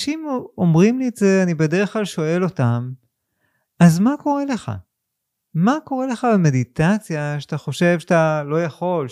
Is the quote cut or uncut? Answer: uncut